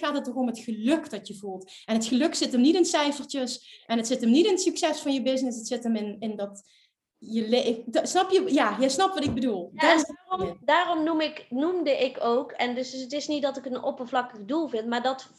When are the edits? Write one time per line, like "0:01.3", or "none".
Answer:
none